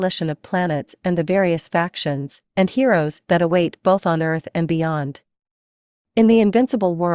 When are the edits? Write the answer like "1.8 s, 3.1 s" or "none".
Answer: 2.5 s